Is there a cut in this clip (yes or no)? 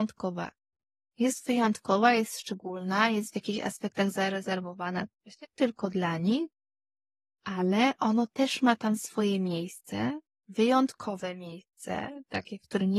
no